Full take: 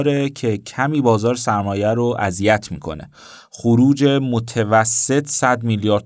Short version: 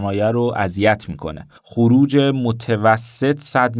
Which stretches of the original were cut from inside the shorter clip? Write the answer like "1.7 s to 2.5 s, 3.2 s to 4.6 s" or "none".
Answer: 3.2 s to 3.4 s